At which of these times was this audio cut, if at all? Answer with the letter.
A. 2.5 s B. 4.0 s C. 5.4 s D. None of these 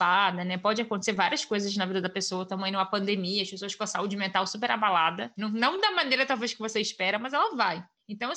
C